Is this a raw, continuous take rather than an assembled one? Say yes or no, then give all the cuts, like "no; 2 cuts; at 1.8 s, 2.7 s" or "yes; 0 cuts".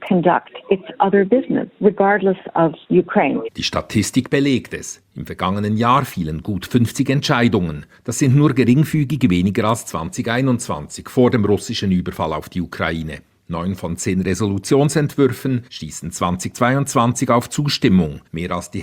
yes; 0 cuts